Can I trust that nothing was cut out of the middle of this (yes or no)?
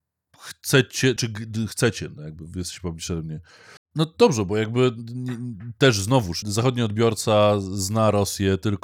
no